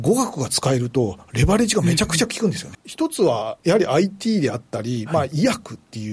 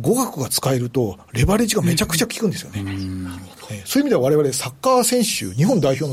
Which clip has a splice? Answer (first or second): first